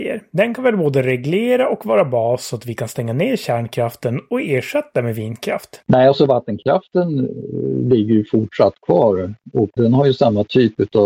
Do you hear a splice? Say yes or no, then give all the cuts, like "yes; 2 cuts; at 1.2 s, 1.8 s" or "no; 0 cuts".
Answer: yes; 1 cut; at 9.8 s